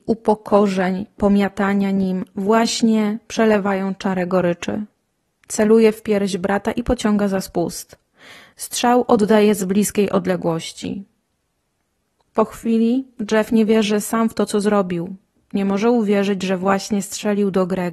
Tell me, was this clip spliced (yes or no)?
no